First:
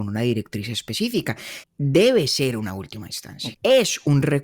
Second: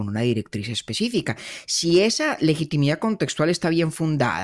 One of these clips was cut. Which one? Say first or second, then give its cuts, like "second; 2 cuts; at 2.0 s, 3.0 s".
first; 2 cuts; at 1.6 s, 3.5 s